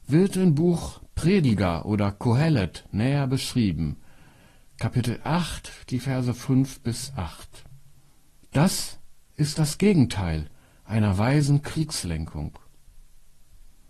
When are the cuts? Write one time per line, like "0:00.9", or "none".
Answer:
0:08.4

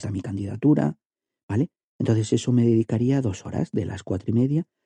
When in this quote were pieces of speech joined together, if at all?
none

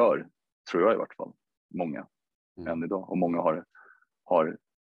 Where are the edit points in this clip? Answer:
none

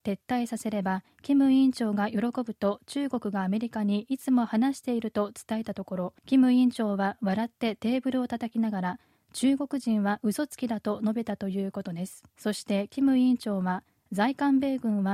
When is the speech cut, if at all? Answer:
0:06.2
0:12.3

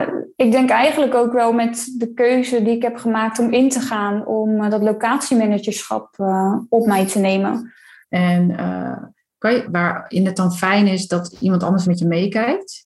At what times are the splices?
0:08.0
0:09.6
0:11.8

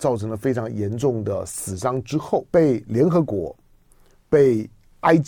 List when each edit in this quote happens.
0:02.5

